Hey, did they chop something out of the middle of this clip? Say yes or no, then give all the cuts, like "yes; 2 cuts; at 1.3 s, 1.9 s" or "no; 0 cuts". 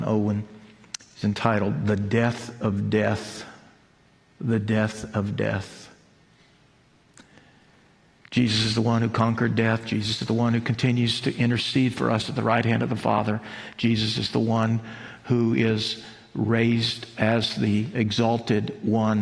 no; 0 cuts